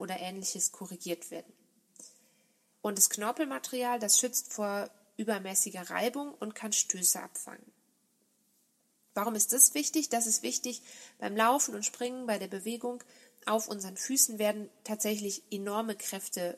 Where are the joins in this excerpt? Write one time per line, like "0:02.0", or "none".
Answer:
0:02.7